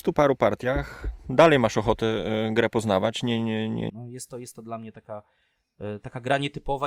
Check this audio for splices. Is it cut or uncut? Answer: cut